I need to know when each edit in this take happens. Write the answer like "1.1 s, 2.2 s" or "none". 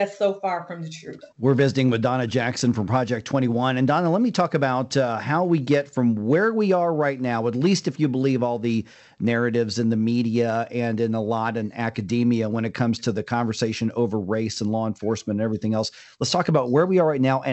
1.3 s